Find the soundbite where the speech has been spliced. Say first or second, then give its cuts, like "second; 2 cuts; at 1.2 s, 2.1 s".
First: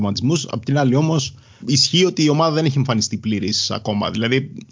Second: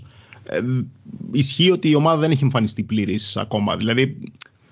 first; 1 cut; at 1.6 s